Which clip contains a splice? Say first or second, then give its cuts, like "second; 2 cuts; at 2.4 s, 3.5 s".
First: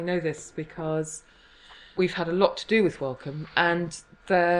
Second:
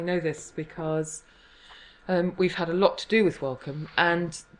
first; 1 cut; at 2.0 s